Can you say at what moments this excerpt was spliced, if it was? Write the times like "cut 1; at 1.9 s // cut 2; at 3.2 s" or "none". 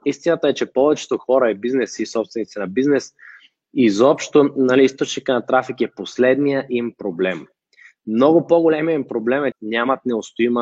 cut 1; at 9.5 s